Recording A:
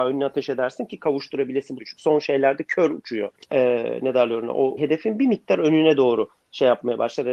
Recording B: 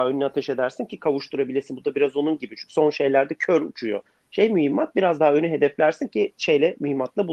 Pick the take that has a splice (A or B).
A